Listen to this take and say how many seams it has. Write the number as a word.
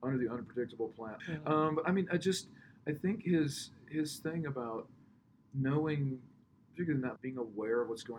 two